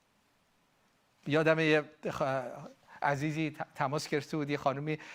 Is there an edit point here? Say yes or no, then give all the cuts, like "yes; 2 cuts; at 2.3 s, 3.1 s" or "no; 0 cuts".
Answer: no; 0 cuts